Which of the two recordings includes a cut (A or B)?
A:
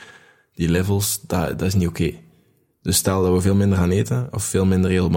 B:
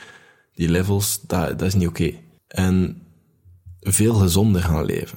B